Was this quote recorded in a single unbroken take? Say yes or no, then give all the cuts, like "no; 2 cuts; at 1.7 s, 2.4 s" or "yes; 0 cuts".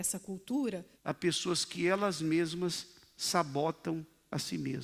no; 1 cut; at 0.9 s